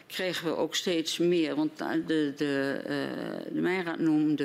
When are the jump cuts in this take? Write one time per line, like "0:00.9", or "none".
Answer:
none